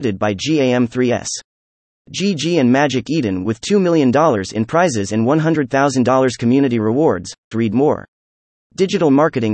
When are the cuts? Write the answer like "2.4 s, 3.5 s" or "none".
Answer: 7.5 s